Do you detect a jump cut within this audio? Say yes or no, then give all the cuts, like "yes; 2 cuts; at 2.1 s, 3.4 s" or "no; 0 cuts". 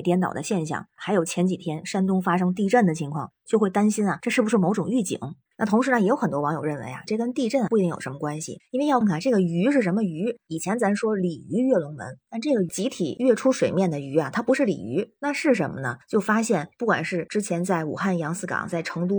yes; 1 cut; at 9.0 s